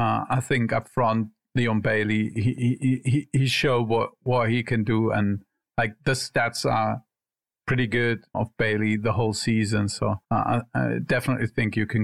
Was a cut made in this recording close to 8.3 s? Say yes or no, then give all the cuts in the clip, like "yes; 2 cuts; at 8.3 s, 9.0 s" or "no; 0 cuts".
yes; 2 cuts; at 8.3 s, 10.2 s